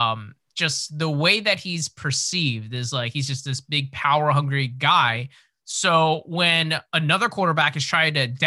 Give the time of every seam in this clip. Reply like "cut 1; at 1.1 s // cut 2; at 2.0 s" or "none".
none